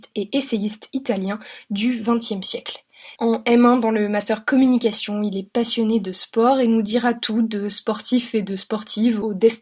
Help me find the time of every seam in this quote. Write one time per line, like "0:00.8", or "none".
0:03.2